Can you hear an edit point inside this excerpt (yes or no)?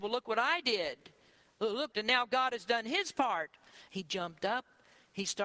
yes